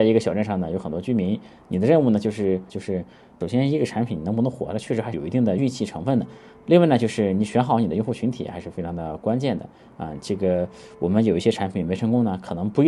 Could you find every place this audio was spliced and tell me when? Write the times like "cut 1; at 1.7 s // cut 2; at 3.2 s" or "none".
cut 1; at 2.7 s